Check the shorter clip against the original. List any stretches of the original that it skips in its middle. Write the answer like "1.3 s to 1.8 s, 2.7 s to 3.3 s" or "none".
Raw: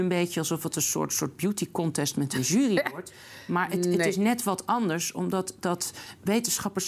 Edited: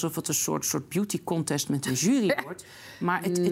none